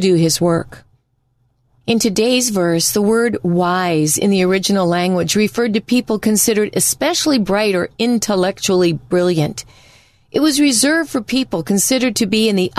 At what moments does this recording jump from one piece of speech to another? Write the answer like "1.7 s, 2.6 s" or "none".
none